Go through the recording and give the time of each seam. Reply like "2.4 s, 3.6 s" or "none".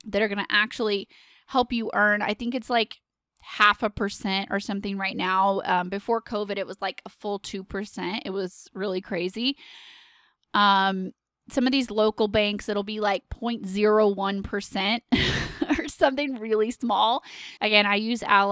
17.6 s